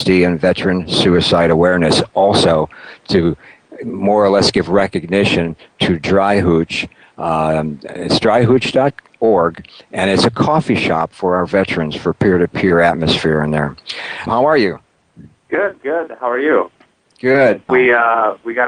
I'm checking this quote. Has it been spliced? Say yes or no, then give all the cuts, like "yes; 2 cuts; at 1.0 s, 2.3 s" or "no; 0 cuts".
yes; 2 cuts; at 14.3 s, 17.7 s